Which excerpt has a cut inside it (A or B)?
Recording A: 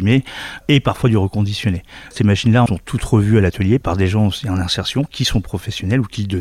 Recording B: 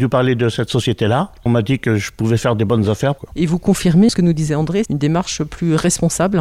B